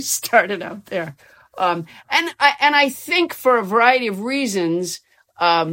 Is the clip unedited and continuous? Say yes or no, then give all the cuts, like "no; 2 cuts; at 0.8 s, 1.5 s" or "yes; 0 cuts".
yes; 0 cuts